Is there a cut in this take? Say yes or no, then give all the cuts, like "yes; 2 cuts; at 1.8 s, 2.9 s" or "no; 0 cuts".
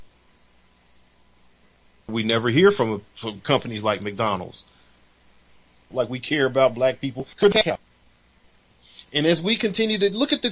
yes; 2 cuts; at 2.1 s, 5.9 s